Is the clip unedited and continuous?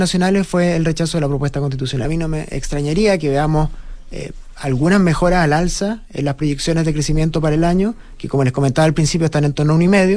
no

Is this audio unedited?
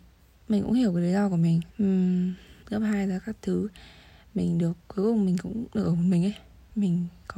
no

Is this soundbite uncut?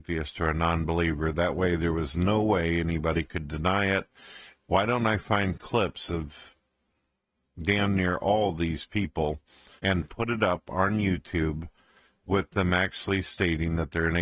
no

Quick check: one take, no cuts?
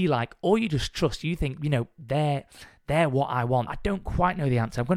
no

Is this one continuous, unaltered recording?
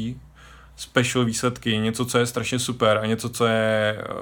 yes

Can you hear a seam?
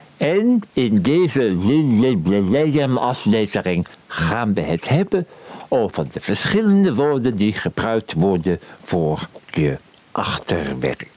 no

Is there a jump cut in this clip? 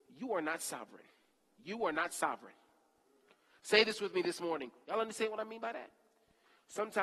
yes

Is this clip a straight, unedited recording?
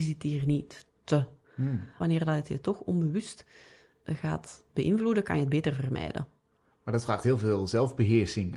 yes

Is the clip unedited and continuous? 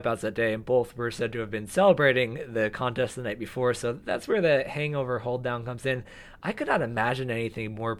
yes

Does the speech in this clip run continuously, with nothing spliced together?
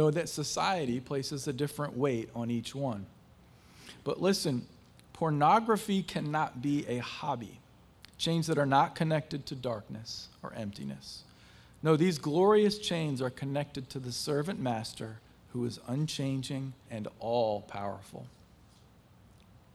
no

